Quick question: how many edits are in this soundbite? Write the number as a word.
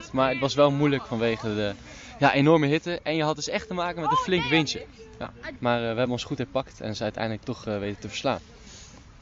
one